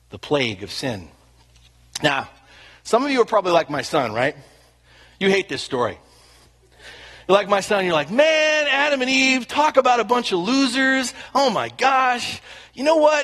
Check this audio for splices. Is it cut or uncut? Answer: uncut